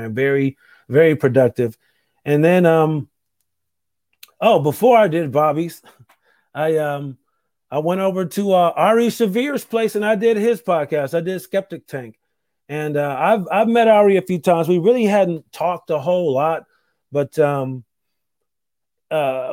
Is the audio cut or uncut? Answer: uncut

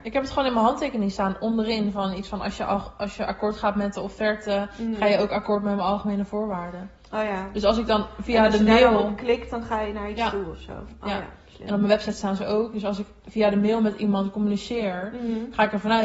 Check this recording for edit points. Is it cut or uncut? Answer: uncut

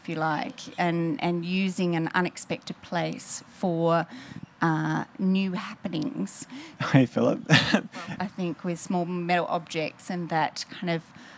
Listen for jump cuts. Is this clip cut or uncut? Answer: cut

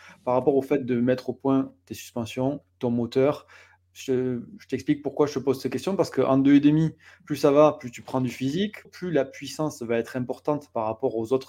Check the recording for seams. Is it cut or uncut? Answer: cut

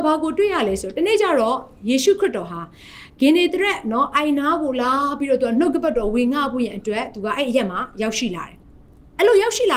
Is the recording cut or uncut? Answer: cut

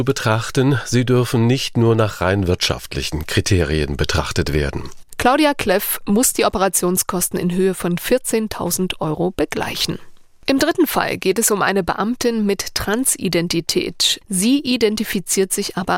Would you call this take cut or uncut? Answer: cut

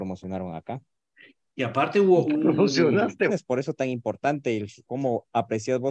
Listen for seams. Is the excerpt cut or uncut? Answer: cut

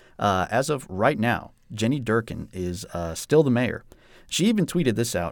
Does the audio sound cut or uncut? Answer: uncut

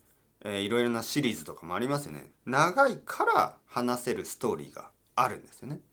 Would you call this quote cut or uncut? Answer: cut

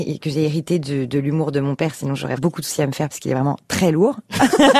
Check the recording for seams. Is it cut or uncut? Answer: cut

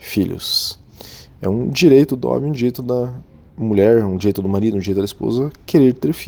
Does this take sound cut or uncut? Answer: uncut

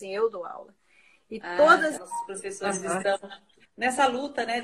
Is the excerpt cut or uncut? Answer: cut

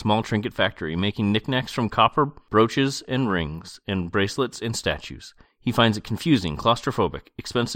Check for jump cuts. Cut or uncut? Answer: cut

